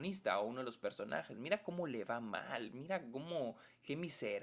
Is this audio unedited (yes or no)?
yes